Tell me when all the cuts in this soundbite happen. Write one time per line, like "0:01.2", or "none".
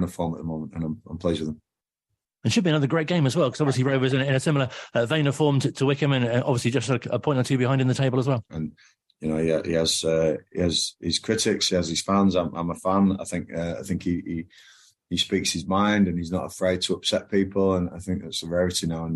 0:08.5
0:17.9